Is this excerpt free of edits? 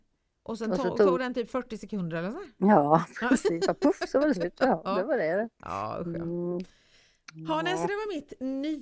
yes; 0 cuts

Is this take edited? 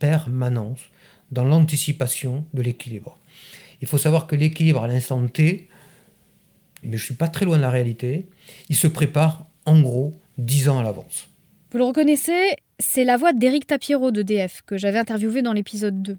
yes; 1 cut; at 6.8 s

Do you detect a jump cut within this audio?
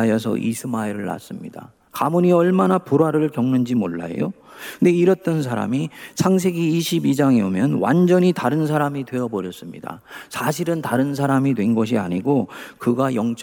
no; 0 cuts

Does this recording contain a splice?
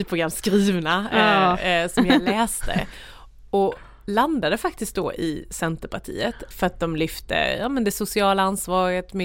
yes; 1 cut; at 6.5 s

